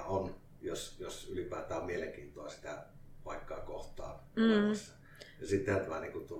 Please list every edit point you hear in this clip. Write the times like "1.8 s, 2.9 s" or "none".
none